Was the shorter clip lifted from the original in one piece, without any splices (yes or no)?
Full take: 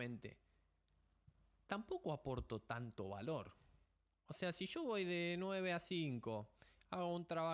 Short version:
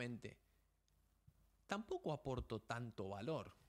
yes